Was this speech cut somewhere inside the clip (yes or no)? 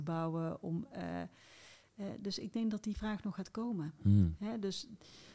no